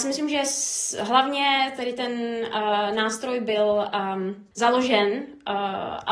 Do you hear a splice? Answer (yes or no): no